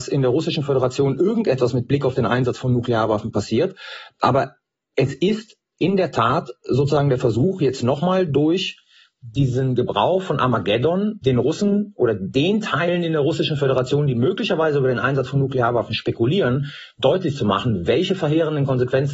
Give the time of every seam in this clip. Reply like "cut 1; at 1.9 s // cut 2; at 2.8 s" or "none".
cut 1; at 11.2 s